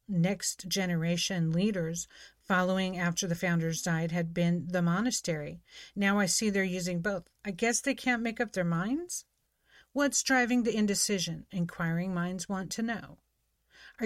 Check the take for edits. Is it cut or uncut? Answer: uncut